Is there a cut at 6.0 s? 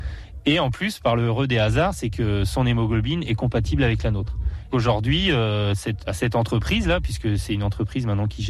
yes; 2 cuts; at 4.7 s, 6.0 s

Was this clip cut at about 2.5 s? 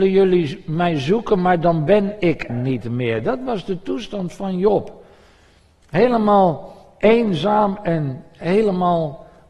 yes; 1 cut; at 2.5 s

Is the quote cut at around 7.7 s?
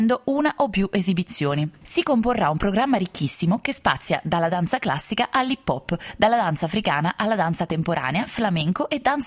yes; 1 cut; at 7.7 s

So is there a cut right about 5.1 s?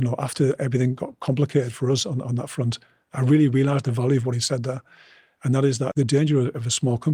no; 0 cuts

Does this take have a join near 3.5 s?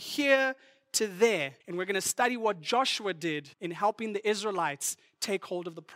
yes; 2 cuts; at 1.6 s, 3.5 s

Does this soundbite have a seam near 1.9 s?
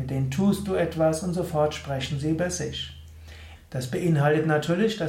no; 1 cut; at 3.6 s

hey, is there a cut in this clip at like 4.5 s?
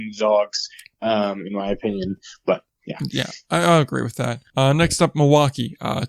yes; 1 cut; at 4.5 s

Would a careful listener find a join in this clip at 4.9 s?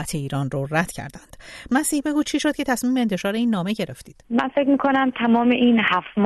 no; 1 cut; at 1.7 s

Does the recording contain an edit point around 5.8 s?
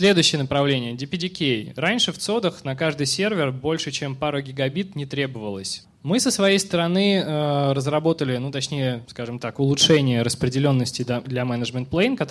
yes; 2 cuts; at 5.8 s, 9.1 s

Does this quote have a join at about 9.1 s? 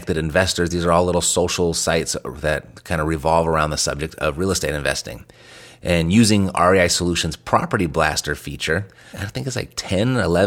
yes; 1 cut; at 9.1 s

